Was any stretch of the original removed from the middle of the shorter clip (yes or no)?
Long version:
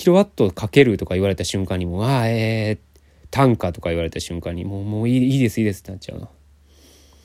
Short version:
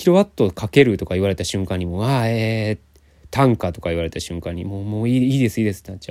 no